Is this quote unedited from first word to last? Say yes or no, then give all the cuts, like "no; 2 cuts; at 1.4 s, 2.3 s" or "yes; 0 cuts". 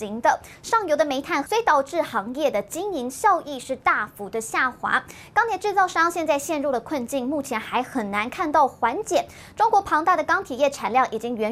no; 1 cut; at 1.4 s